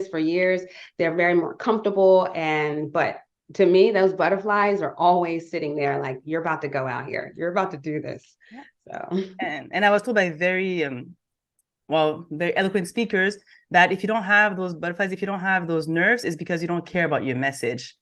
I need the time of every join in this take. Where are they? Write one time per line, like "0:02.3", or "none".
none